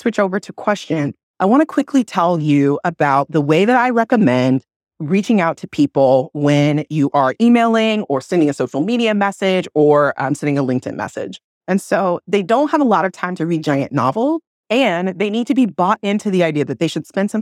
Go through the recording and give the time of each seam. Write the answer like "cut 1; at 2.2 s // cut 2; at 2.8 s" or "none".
cut 1; at 11.5 s